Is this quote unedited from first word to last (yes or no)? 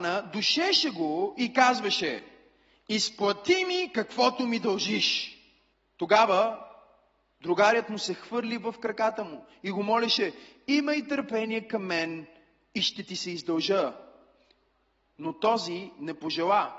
yes